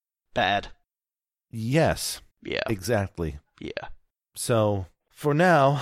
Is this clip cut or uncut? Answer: cut